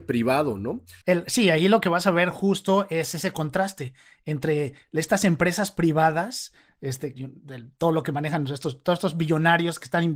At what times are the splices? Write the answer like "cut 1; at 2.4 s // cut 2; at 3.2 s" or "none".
cut 1; at 1.0 s // cut 2; at 7.1 s